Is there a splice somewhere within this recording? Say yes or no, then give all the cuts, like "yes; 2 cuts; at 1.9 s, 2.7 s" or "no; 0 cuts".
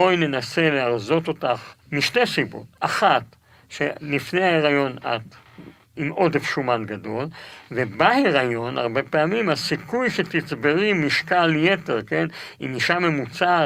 yes; 1 cut; at 1.8 s